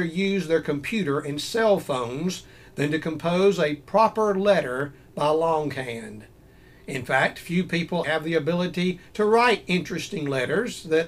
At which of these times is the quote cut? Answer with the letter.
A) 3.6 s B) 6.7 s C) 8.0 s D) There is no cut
C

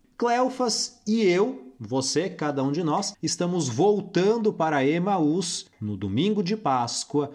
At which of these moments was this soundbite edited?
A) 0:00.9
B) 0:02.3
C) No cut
C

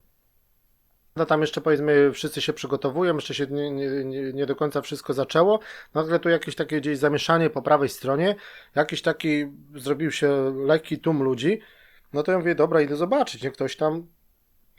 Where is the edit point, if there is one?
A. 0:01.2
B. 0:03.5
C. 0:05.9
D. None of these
A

